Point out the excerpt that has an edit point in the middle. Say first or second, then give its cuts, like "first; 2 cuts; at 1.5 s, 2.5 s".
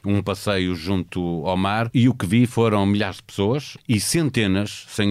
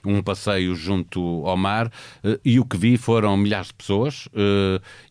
first; 2 cuts; at 1.9 s, 3.8 s